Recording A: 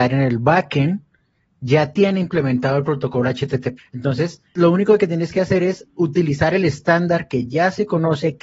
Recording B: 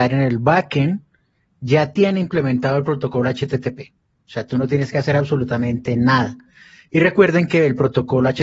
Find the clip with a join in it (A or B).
A